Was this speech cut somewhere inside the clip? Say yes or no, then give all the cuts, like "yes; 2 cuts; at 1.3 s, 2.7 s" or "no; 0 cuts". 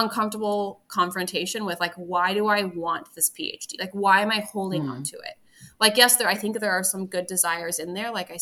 no; 0 cuts